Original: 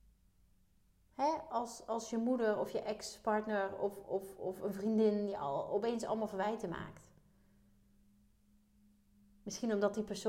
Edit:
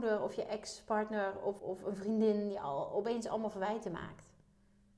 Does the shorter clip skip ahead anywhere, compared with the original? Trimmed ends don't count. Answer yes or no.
yes